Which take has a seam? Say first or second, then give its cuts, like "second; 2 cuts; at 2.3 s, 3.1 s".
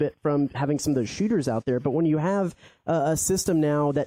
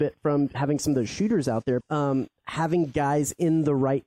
second; 1 cut; at 1.8 s